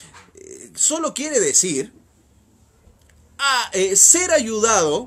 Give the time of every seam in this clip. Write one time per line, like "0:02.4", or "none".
none